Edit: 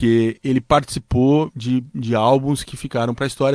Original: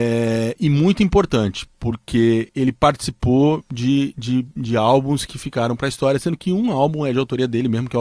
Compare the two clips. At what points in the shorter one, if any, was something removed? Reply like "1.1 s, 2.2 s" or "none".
1.5 s